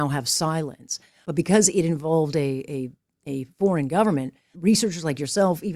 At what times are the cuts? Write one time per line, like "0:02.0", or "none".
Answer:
0:01.2
0:04.5